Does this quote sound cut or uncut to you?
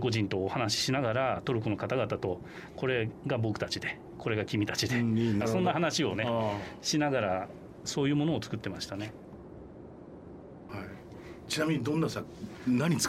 cut